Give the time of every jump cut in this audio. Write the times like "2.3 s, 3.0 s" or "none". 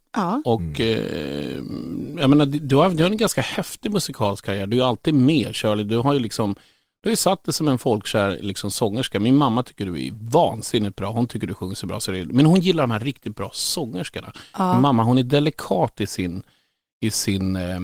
none